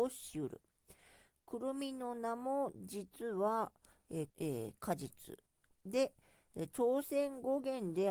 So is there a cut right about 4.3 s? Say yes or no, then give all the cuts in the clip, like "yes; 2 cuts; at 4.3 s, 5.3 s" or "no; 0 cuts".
yes; 1 cut; at 4.3 s